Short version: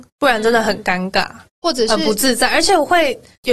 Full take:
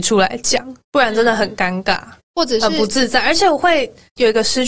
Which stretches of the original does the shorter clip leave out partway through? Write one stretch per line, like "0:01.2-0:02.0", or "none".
none